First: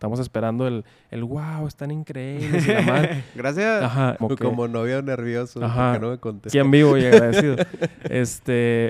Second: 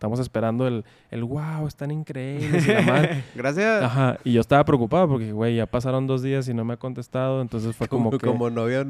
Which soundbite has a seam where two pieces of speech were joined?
first; 2 cuts; at 4.2 s, 6.5 s

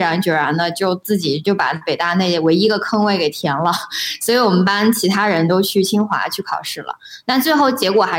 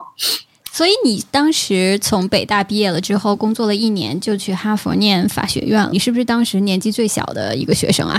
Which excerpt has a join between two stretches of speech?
second; 1 cut; at 5.9 s

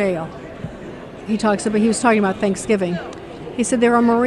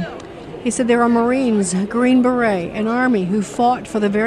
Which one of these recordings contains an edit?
first; 1 cut; at 1.2 s

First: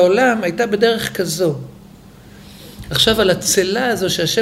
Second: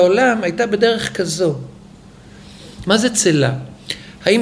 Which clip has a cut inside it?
second; 1 cut; at 2.8 s

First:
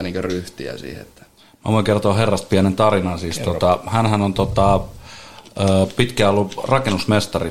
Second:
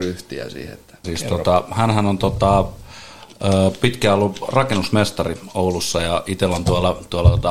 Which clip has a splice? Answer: second; 1 cut; at 1.0 s

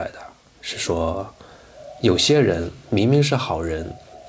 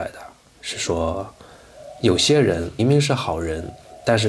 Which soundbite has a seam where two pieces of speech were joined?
second; 1 cut; at 2.8 s

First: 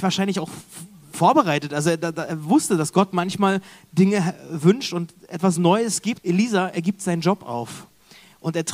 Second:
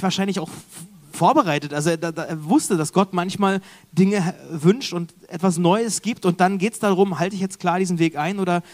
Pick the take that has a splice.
first; 1 cut; at 6.2 s

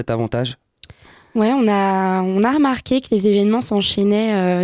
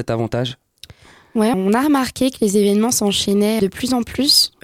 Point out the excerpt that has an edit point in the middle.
second; 2 cuts; at 1.5 s, 3.6 s

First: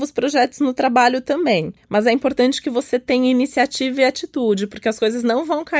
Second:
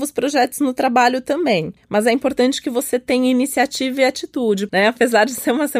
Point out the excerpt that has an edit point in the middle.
second; 1 cut; at 4.7 s

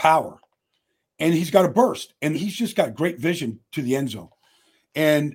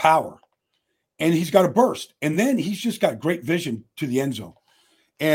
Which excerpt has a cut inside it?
first; 1 cut; at 2.3 s

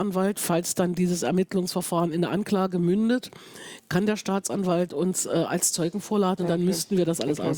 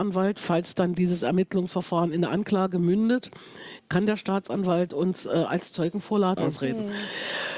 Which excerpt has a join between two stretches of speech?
second; 1 cut; at 6.4 s

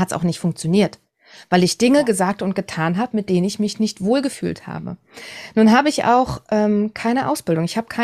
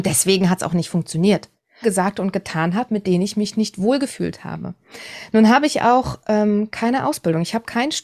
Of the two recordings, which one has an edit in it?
second; 1 cut; at 1.8 s

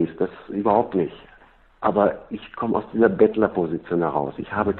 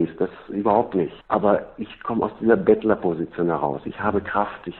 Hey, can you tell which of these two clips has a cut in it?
second; 1 cut; at 1.2 s

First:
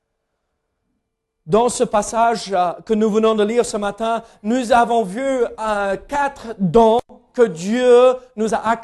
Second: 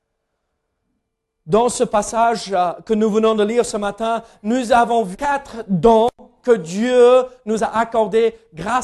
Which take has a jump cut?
second; 1 cut; at 5.1 s

